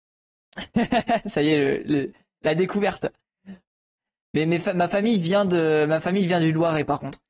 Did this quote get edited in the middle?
yes; 1 cut; at 3.6 s

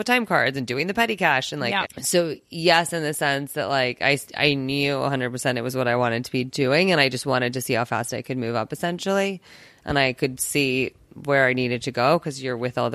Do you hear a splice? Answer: yes; 1 cut; at 1.8 s

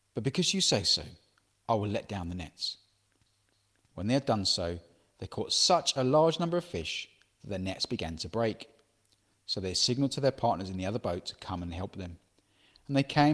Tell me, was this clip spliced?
no; 0 cuts

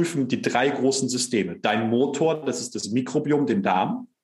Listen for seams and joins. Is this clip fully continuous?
yes; 0 cuts

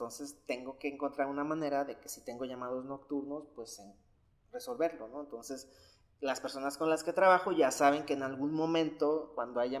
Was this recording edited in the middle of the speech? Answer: no; 0 cuts

